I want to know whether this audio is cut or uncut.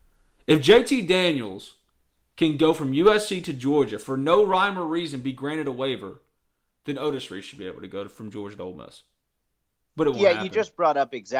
uncut